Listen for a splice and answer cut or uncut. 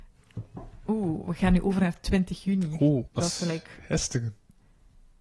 cut